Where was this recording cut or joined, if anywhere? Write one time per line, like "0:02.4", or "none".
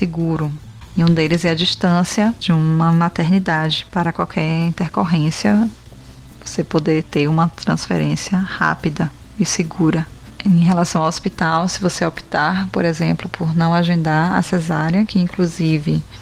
none